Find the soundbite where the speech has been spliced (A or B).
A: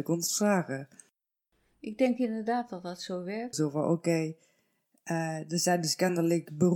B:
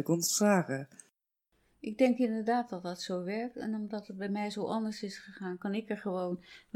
A